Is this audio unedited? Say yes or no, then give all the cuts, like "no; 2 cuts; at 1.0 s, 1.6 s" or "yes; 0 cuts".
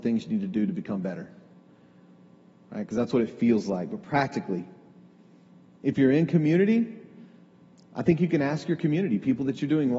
yes; 0 cuts